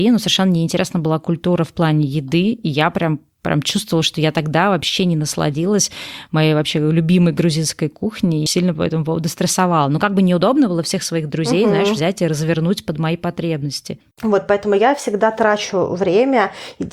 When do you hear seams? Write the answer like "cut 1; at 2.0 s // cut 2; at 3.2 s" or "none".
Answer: cut 1; at 8.5 s // cut 2; at 14.1 s